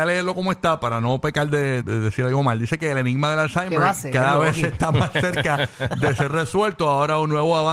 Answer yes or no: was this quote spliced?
yes